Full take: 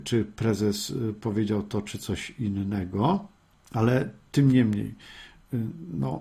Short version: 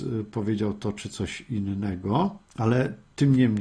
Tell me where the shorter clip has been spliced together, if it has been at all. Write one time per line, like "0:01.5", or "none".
0:02.5